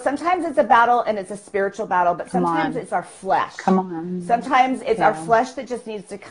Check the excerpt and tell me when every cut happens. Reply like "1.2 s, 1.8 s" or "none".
none